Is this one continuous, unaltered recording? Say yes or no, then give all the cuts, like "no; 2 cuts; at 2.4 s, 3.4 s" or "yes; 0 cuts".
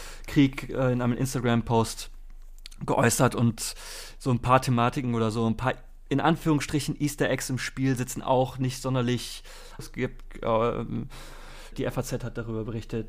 no; 2 cuts; at 9.8 s, 11.7 s